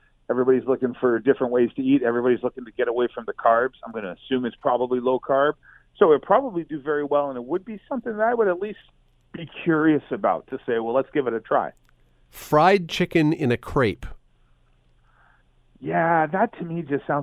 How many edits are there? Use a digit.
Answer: 0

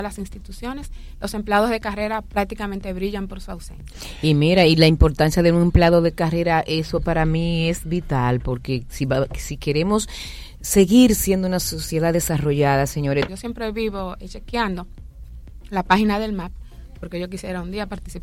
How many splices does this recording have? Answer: 1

